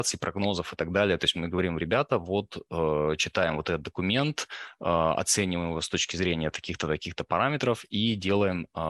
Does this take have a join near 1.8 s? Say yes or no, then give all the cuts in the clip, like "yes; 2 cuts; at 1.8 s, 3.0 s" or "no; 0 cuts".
no; 0 cuts